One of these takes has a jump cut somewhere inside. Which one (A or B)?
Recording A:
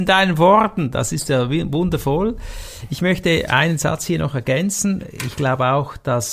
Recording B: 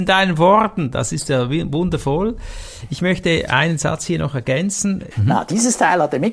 B